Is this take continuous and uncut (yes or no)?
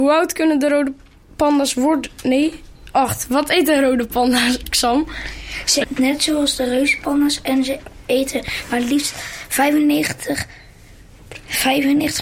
no